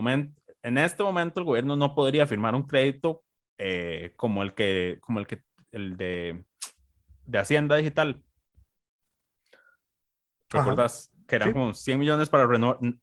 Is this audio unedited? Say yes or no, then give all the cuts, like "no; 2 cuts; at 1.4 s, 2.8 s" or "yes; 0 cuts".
yes; 0 cuts